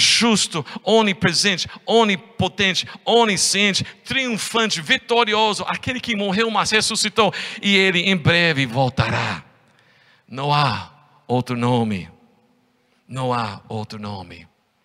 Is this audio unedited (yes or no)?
yes